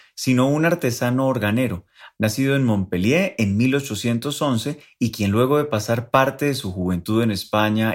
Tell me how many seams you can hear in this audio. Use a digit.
1